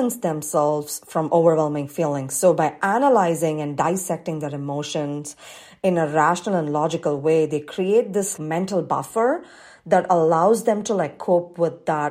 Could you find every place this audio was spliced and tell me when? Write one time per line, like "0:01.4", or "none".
0:08.4